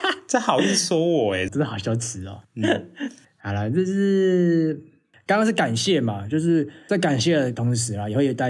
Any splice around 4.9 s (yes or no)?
no